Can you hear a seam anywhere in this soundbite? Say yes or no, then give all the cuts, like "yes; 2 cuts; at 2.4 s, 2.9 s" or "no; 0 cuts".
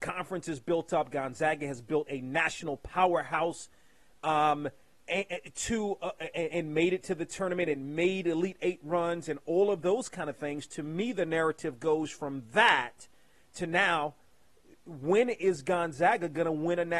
yes; 1 cut; at 6.3 s